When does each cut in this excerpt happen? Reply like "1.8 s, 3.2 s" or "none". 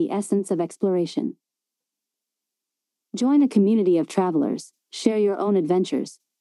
none